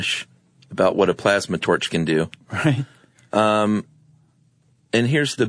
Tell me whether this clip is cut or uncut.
uncut